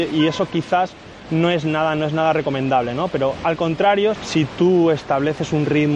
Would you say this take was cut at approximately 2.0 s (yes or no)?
no